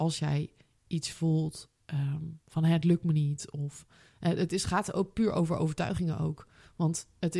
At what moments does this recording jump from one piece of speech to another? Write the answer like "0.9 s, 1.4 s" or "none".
none